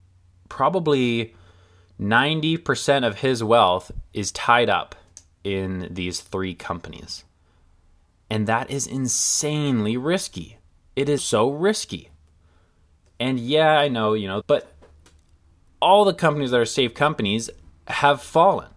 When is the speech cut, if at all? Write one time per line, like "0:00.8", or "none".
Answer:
0:11.2
0:14.4